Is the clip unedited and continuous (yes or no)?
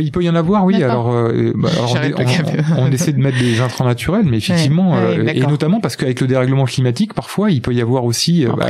yes